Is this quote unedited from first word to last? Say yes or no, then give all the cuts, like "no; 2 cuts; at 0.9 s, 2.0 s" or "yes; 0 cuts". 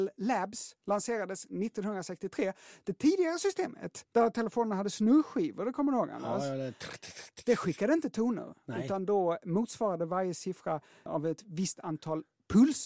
yes; 0 cuts